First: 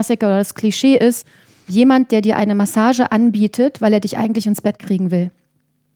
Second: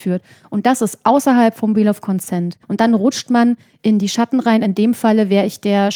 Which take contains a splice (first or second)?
second